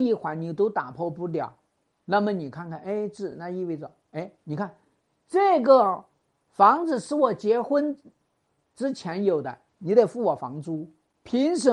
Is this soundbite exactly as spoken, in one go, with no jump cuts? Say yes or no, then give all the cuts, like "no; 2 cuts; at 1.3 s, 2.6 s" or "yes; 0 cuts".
yes; 0 cuts